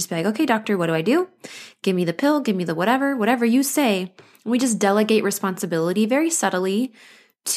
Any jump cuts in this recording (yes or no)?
no